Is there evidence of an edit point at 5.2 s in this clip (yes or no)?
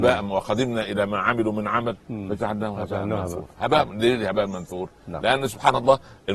no